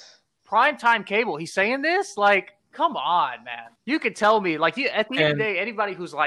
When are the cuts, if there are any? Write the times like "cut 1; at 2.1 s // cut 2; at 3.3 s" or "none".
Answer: cut 1; at 3.7 s